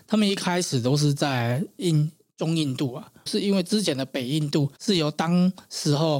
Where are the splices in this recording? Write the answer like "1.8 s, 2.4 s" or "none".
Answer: 3.3 s, 4.8 s